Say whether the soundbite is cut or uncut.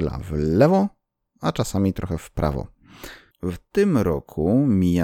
cut